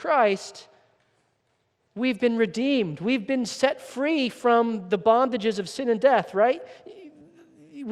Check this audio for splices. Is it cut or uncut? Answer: uncut